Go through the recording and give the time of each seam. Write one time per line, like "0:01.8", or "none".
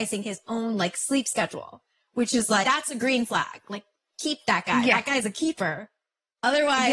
0:02.6